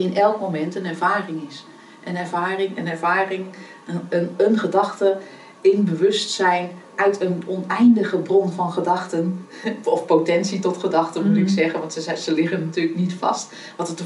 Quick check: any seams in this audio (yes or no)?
no